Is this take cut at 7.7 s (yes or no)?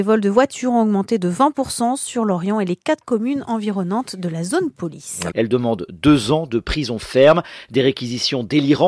no